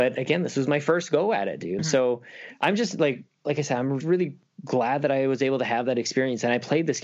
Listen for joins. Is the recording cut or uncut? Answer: cut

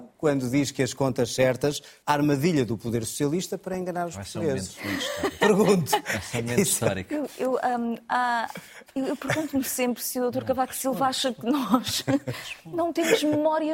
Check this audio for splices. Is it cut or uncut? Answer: cut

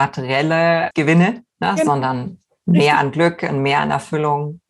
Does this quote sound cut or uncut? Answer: cut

